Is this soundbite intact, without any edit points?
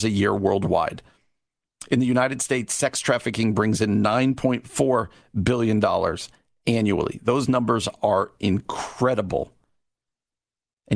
yes; 0 cuts

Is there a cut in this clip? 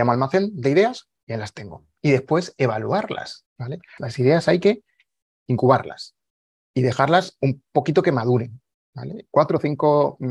yes; 3 cuts; at 2.0 s, 4.0 s, 9.3 s

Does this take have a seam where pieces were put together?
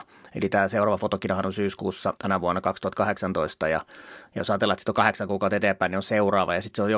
yes; 1 cut; at 2.2 s

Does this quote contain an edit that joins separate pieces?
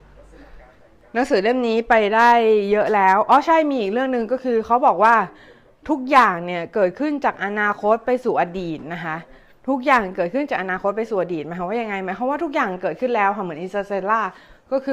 no; 0 cuts

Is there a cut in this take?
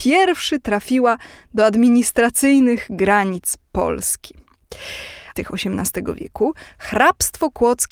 yes; 1 cut; at 5.3 s

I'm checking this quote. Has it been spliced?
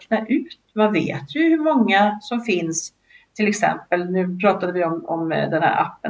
no; 0 cuts

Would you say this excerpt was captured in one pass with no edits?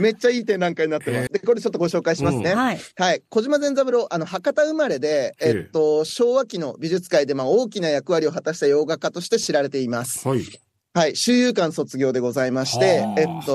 no; 1 cut; at 1.3 s

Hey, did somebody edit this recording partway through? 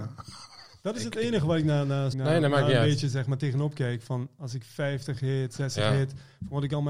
yes; 1 cut; at 2.1 s

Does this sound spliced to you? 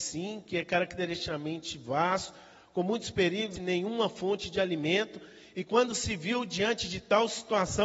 yes; 1 cut; at 3.6 s

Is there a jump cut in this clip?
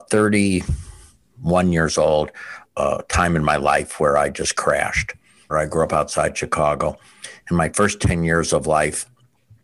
yes; 2 cuts; at 2.7 s, 5.5 s

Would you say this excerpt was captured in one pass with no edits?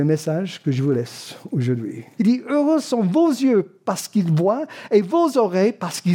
no; 1 cut; at 2.2 s

